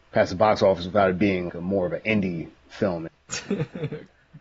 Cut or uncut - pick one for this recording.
cut